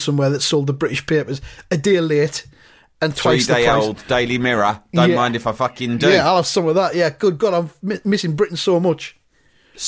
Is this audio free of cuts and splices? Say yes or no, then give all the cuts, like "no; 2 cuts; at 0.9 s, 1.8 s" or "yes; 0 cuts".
yes; 0 cuts